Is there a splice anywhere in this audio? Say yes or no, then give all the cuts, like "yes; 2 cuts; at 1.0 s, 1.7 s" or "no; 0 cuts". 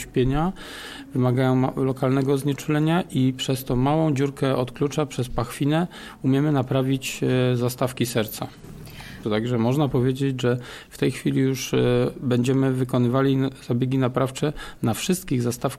yes; 1 cut; at 9.2 s